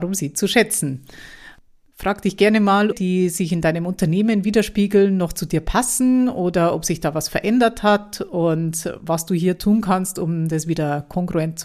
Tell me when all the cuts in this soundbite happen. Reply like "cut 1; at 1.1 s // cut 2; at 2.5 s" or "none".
cut 1; at 2.9 s